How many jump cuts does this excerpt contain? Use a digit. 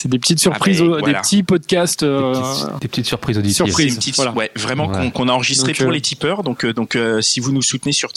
0